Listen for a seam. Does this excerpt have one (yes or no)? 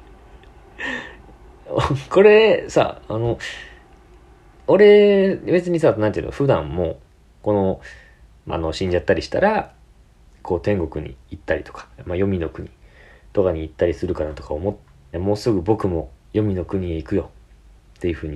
yes